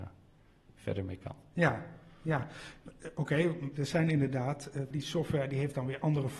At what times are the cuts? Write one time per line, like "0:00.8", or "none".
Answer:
0:03.7
0:04.9